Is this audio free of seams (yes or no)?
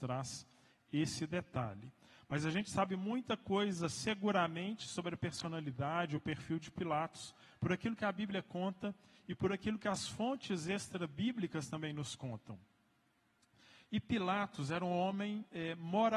yes